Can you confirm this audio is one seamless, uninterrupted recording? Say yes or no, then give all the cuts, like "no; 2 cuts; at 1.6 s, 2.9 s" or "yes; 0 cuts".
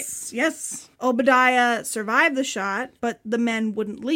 no; 2 cuts; at 0.9 s, 3.0 s